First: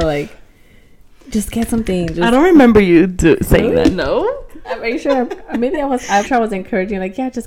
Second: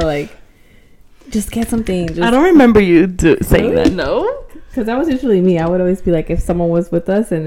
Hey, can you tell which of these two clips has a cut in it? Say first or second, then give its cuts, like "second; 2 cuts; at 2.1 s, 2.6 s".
first; 2 cuts; at 4.6 s, 6.3 s